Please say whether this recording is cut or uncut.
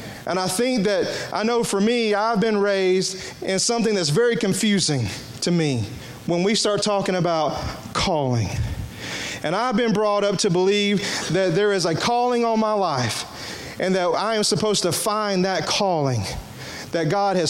uncut